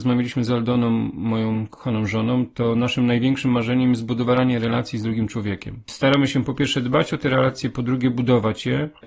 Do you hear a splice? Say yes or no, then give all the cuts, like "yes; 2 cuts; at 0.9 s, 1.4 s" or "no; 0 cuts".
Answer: no; 0 cuts